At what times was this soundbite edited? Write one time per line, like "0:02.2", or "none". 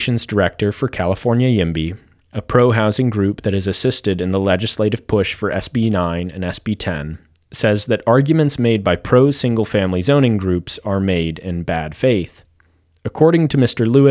none